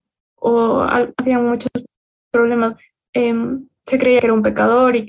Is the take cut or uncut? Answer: cut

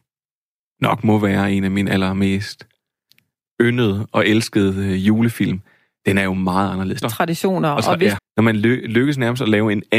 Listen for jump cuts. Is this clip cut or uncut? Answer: cut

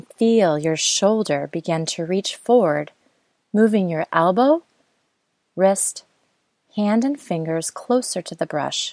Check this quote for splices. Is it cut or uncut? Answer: uncut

